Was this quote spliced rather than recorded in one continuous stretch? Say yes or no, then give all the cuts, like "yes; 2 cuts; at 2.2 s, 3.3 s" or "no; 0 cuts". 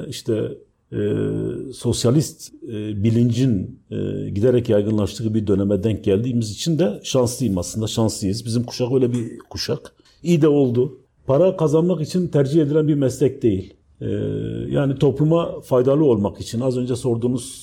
yes; 1 cut; at 11.2 s